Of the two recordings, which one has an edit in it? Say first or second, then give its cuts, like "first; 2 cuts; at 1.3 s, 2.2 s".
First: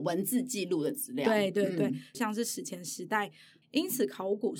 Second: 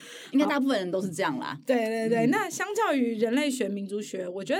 first; 2 cuts; at 2.1 s, 3.6 s